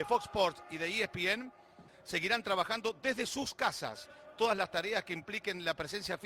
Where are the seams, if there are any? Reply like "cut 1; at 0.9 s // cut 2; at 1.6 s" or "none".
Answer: cut 1; at 1.9 s